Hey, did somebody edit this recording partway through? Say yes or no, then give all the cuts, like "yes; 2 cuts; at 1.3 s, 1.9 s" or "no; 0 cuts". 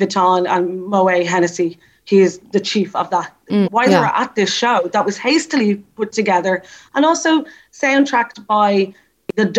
yes; 1 cut; at 3.6 s